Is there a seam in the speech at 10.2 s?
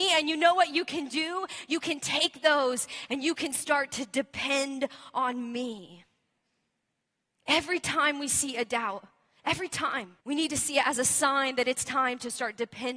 yes; 1 cut; at 10.2 s

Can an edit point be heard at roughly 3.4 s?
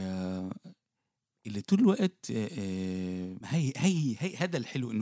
yes; 1 cut; at 3.4 s

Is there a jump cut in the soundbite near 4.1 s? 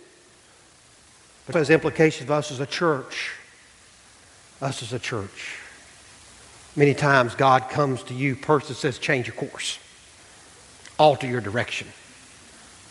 no; 1 cut; at 1.5 s

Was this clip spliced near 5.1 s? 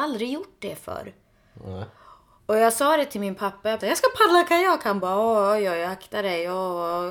no; 1 cut; at 3.8 s

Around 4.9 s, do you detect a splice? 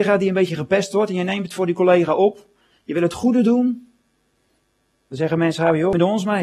no; 0 cuts

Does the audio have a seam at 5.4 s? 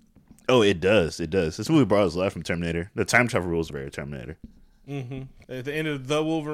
yes; 2 cuts; at 3.7 s, 5.4 s

